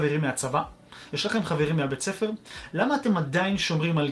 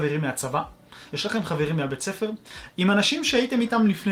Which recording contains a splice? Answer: second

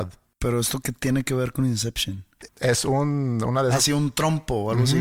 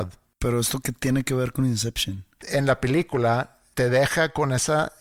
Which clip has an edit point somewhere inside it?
first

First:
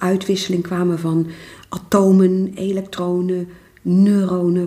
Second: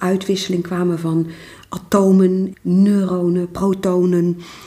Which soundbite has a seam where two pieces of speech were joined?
second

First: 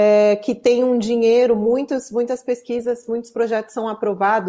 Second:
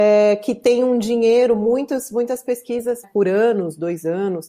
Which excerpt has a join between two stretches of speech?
second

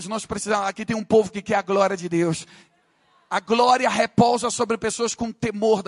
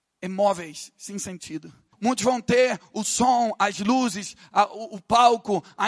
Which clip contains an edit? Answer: second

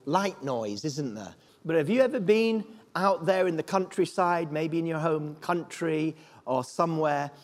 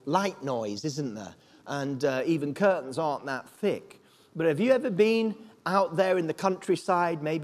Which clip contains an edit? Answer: first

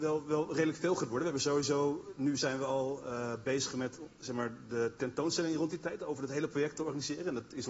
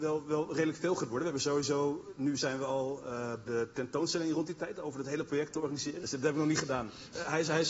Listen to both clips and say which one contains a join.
second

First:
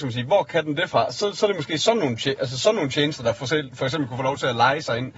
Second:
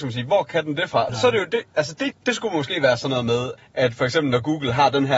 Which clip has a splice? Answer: second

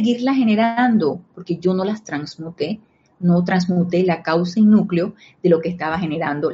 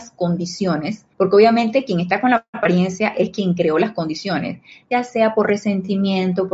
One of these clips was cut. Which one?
second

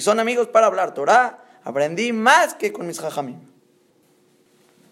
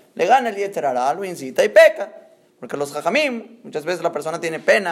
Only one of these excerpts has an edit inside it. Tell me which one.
second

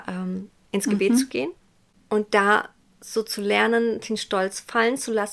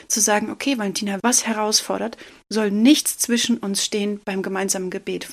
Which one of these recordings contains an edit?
second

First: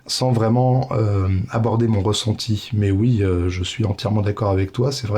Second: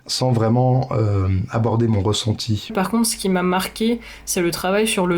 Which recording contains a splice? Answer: second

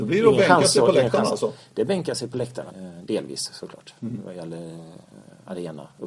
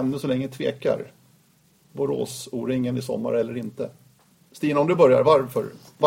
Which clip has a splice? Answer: first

